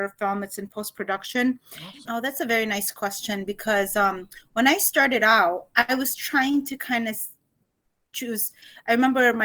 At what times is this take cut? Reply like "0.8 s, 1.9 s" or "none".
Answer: 2.0 s